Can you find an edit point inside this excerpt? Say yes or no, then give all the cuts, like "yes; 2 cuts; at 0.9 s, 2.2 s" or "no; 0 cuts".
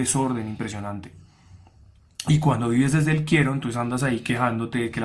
no; 0 cuts